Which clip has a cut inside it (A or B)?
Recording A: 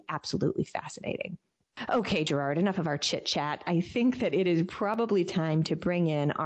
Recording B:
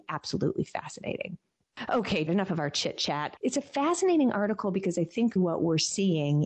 B